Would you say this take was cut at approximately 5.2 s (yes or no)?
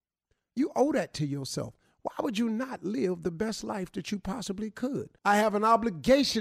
yes